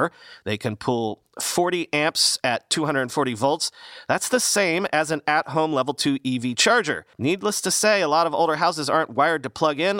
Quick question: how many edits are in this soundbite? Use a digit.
1